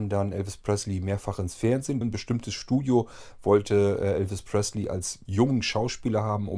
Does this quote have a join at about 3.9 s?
no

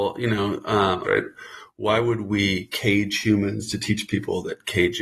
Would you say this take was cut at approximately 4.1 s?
no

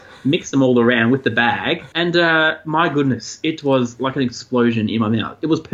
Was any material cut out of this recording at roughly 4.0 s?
no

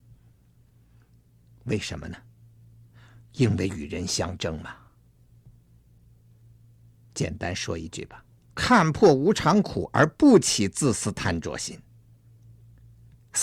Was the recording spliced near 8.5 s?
yes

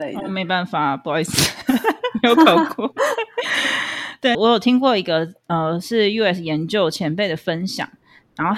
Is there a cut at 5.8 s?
no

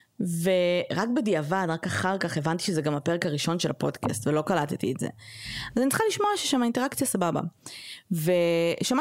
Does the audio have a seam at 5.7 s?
yes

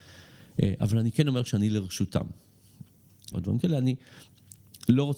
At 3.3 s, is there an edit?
yes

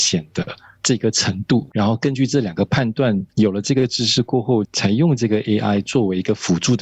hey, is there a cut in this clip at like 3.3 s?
yes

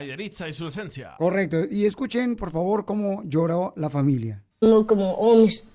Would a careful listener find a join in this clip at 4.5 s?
yes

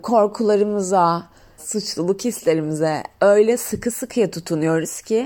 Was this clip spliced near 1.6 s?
yes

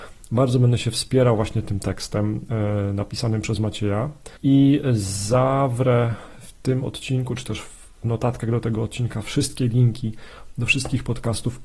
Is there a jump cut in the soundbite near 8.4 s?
no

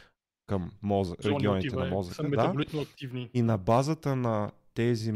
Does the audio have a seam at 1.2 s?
yes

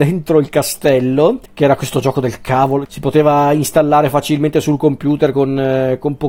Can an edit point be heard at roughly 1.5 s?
yes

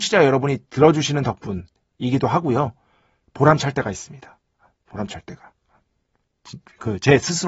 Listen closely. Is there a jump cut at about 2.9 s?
no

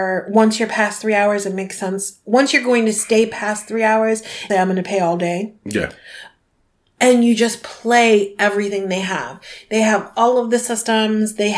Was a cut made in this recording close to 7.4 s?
no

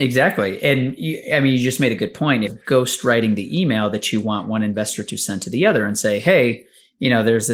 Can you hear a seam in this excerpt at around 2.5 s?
yes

